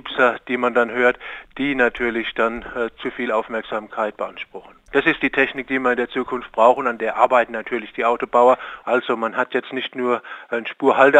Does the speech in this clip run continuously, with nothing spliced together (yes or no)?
no